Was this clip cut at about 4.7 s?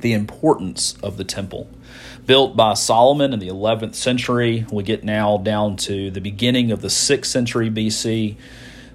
no; 0 cuts

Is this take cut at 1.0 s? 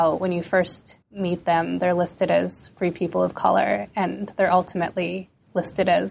yes; 1 cut; at 1.0 s

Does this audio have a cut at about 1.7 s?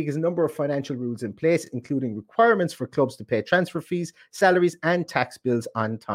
no; 0 cuts

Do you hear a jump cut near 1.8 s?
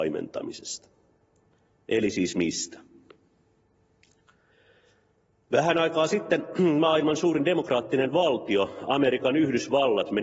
no; 0 cuts

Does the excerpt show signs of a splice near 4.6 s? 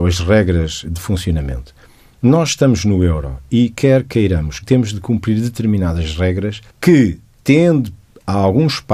yes; 2 cuts; at 4.6 s, 6.7 s

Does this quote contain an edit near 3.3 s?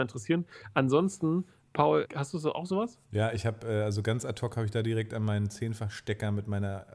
no; 1 cut; at 2.0 s

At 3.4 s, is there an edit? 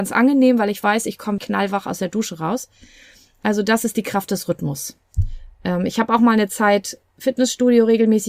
no; 1 cut; at 1.4 s

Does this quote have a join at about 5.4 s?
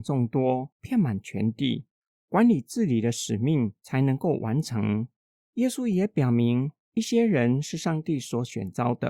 yes; 1 cut; at 5.4 s

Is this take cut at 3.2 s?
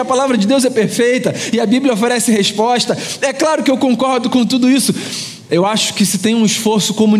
no; 1 cut; at 5.5 s

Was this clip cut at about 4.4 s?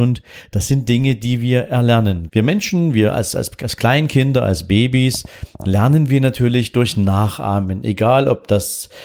no; 1 cut; at 2.3 s

